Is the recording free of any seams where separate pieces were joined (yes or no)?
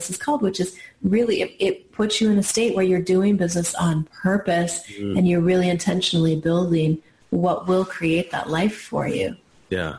yes